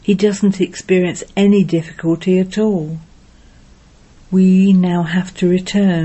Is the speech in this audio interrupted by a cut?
yes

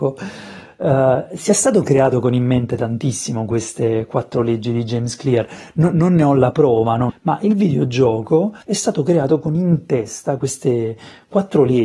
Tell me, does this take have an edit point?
yes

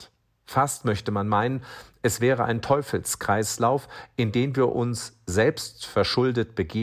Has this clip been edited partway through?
no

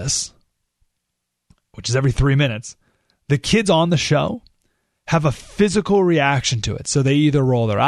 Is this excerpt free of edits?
yes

